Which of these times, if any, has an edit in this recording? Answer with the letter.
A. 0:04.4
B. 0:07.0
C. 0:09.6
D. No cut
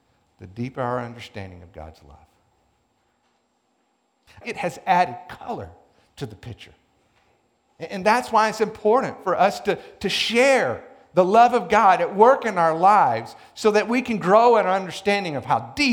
A